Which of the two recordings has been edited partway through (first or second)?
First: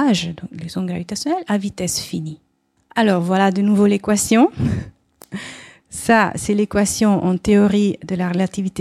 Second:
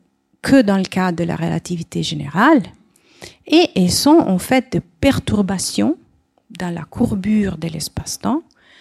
first